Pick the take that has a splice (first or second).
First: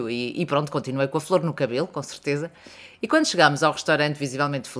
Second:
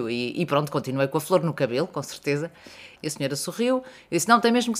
second